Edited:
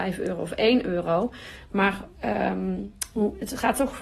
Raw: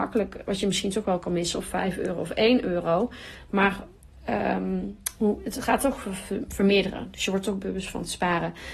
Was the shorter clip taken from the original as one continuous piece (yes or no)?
no